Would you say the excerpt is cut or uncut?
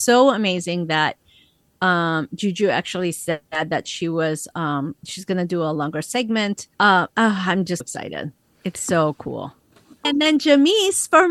cut